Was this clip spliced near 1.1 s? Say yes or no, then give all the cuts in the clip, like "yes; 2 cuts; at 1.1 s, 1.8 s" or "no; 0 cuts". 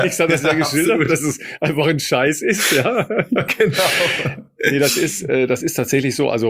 no; 0 cuts